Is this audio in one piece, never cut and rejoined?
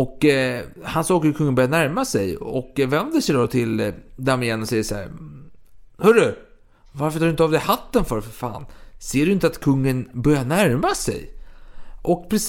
yes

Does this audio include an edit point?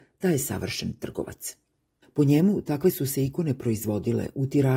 yes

